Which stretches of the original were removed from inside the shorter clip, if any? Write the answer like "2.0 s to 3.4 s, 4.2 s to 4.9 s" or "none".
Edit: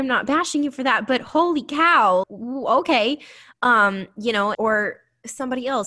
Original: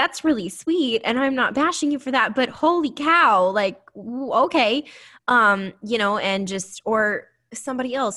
3.5 s to 3.9 s, 6.2 s to 6.8 s